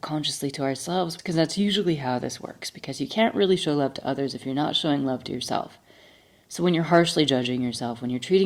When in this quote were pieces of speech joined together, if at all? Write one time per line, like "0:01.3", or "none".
0:01.2